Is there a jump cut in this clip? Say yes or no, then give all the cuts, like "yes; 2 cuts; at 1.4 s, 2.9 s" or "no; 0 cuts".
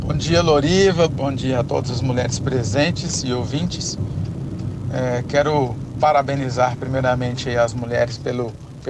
yes; 1 cut; at 1.1 s